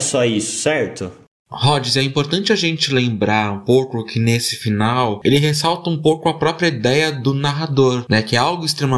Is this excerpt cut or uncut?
uncut